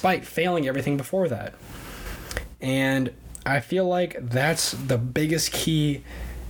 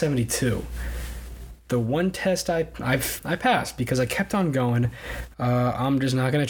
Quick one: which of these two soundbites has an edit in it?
second; 2 cuts; at 3.2 s, 5.3 s

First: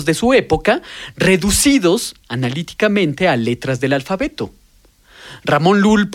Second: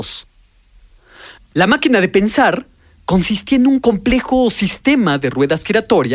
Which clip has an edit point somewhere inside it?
second; 1 cut; at 1.4 s

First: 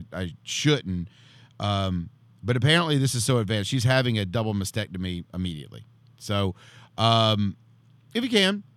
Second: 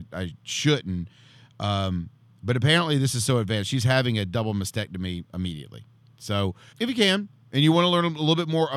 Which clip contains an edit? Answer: second; 1 cut; at 6.7 s

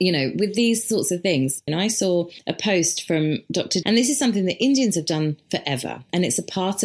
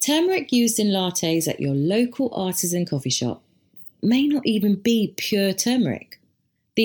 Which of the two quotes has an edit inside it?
first; 2 cuts; at 1.7 s, 3.8 s

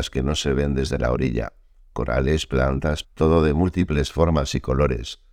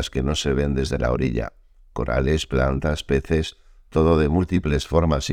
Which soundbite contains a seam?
first; 1 cut; at 3.0 s

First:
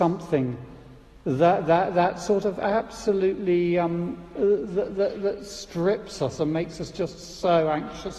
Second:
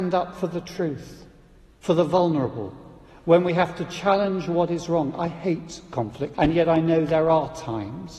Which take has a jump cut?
second; 1 cut; at 6.3 s

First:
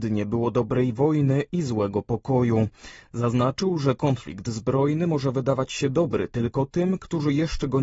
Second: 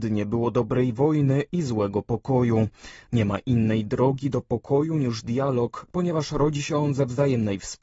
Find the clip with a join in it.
second; 1 cut; at 3.0 s

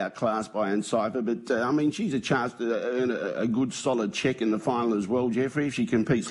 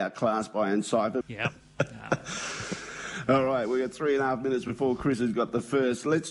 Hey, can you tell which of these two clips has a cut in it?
second; 1 cut; at 1.2 s

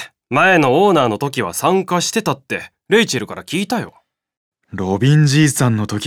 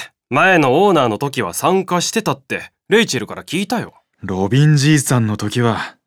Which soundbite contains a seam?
second; 1 cut; at 4.1 s

